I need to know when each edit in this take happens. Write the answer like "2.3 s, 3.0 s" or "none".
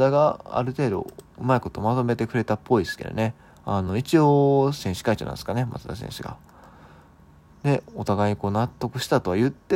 none

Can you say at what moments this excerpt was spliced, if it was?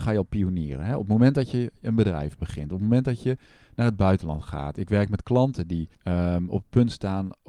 5.9 s

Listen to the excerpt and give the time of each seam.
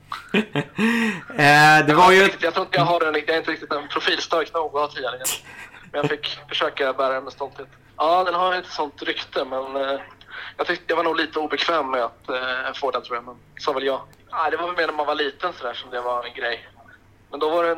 7.9 s, 14.1 s

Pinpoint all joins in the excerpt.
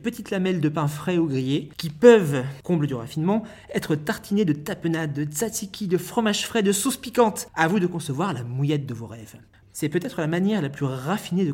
9.6 s

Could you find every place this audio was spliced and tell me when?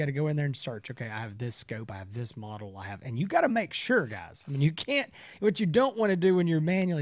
none

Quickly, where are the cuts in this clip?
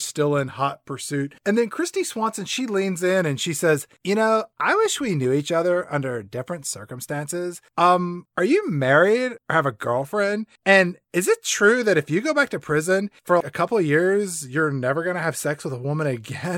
13.4 s

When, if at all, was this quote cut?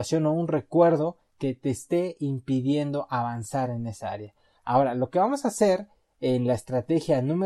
4.6 s

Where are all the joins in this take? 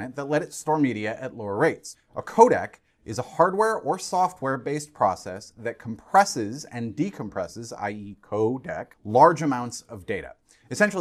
8.9 s

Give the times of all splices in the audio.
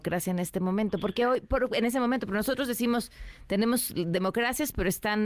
none

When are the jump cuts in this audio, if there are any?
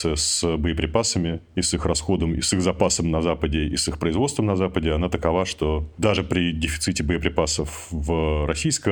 none

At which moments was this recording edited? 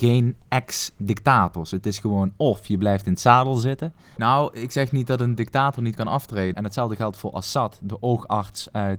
4.2 s, 6.5 s

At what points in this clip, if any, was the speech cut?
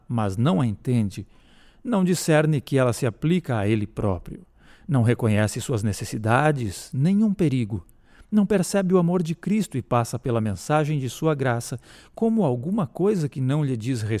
none

